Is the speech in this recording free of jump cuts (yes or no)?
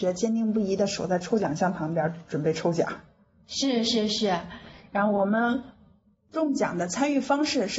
yes